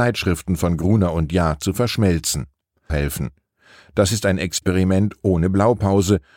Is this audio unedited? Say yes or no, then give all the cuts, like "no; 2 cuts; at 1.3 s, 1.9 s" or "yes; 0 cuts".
no; 1 cut; at 2.9 s